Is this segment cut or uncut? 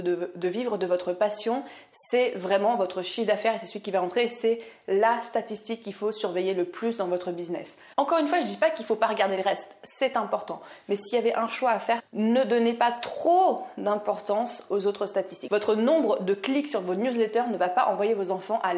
cut